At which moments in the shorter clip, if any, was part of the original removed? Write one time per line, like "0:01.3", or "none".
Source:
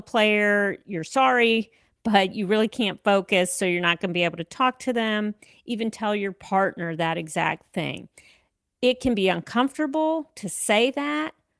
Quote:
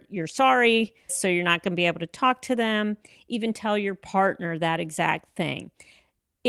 0:01.1